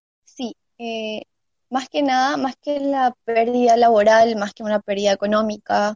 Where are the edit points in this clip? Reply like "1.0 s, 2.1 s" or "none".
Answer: none